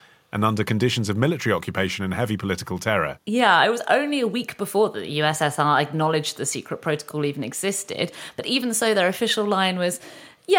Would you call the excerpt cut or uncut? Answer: uncut